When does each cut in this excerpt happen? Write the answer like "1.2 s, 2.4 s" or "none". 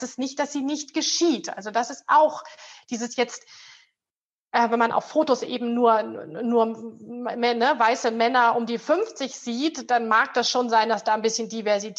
none